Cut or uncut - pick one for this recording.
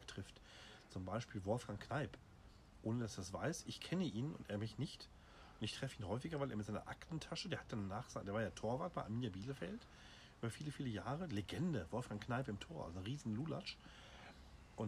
uncut